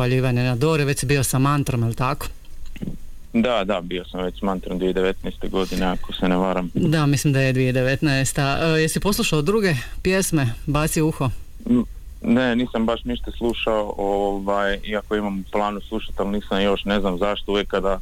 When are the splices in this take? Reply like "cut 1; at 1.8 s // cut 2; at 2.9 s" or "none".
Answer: none